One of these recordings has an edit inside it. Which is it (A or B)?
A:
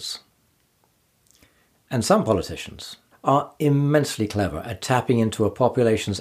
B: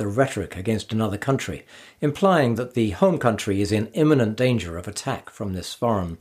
A